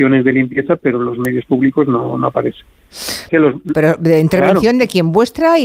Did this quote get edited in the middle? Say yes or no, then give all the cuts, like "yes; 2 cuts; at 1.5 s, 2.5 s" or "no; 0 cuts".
yes; 1 cut; at 3.3 s